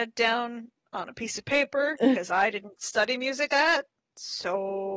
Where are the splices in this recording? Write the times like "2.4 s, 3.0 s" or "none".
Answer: 3.5 s